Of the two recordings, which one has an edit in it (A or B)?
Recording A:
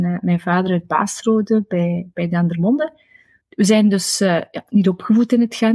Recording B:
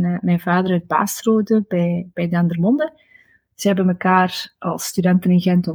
A